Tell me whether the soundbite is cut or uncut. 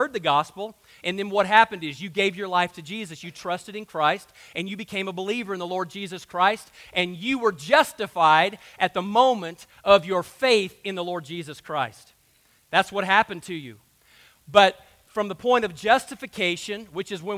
uncut